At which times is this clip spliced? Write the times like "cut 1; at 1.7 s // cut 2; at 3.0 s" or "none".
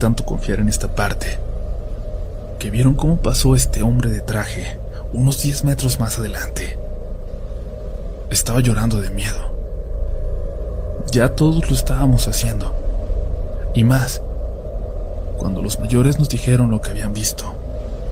cut 1; at 8.2 s